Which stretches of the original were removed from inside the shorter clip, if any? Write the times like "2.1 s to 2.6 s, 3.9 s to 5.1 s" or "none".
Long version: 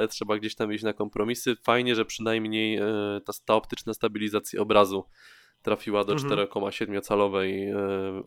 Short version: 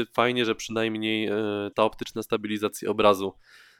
3.2 s to 3.4 s